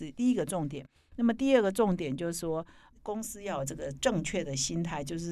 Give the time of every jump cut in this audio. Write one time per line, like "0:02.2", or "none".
none